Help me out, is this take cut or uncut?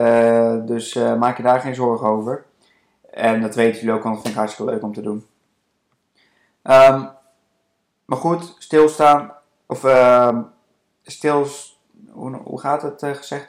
uncut